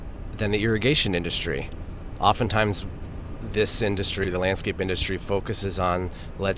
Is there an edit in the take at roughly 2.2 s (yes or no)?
no